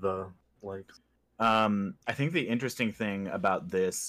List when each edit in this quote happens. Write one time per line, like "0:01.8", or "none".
0:02.0